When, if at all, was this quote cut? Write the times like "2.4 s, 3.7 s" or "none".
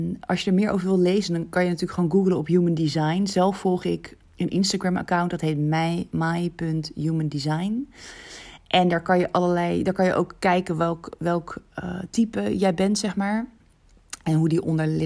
none